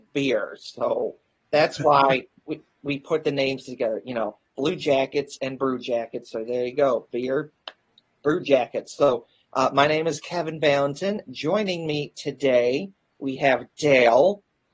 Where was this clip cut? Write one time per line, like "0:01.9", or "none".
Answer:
none